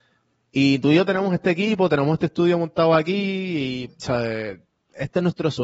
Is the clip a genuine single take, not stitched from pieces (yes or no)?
no